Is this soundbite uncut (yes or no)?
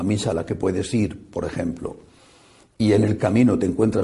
yes